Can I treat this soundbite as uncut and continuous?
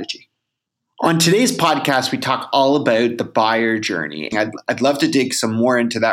no; 1 cut; at 4.3 s

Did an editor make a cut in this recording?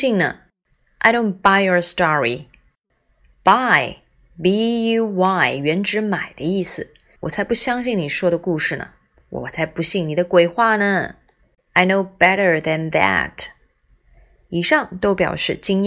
yes; 2 cuts; at 7.2 s, 11.6 s

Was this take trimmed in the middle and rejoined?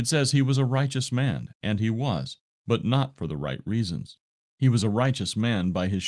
no; 0 cuts

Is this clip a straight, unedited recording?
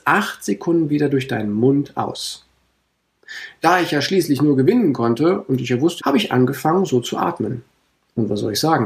no; 1 cut; at 6.0 s

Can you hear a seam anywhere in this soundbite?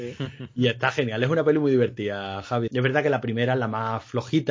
yes; 1 cut; at 2.7 s

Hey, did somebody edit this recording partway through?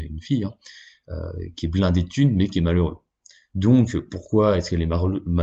no; 0 cuts

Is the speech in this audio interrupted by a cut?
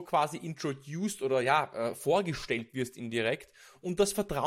no; 0 cuts

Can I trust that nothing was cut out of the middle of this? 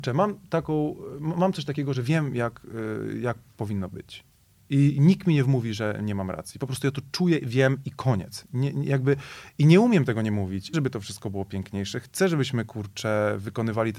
no; 2 cuts; at 9.5 s, 10.7 s

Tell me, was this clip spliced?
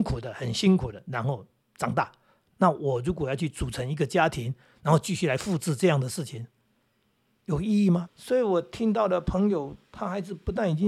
yes; 2 cuts; at 8.1 s, 9.8 s

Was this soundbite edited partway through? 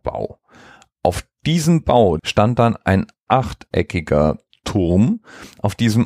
yes; 1 cut; at 2.2 s

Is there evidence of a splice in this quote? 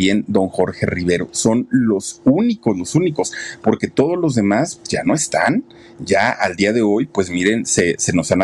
yes; 1 cut; at 4.8 s

